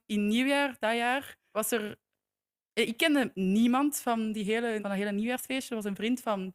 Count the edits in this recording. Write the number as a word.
two